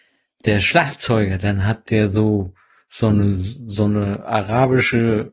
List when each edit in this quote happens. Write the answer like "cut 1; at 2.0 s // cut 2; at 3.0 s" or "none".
none